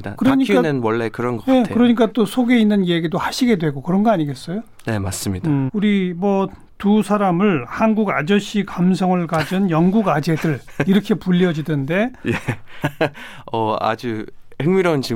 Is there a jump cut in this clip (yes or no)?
yes